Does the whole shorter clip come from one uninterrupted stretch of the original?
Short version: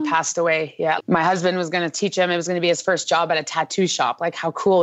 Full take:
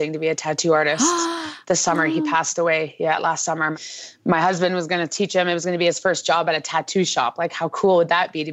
no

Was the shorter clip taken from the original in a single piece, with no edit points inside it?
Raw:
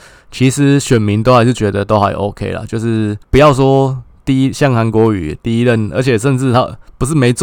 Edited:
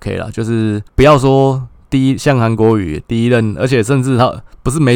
yes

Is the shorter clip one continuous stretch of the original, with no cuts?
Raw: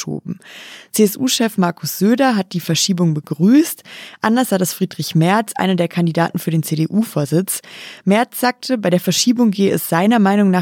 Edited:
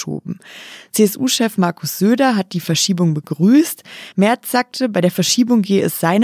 no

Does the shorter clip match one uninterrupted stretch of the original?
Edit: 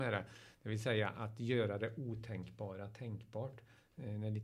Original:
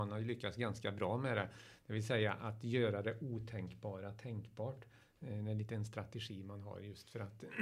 yes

